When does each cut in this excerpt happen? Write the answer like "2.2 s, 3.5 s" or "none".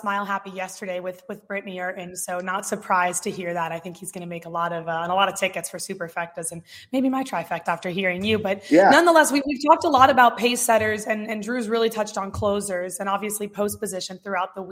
7.7 s